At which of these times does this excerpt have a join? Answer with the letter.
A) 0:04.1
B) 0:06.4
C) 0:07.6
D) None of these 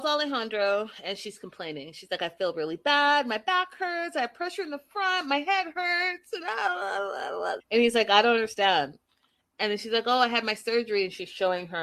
C